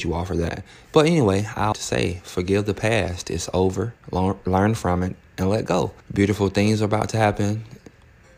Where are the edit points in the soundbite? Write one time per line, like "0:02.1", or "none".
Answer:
0:01.7
0:06.0